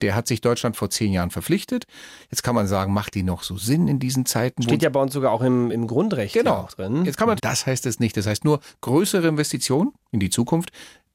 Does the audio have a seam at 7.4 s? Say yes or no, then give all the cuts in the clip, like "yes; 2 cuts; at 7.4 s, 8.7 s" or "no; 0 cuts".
yes; 2 cuts; at 5.7 s, 7.4 s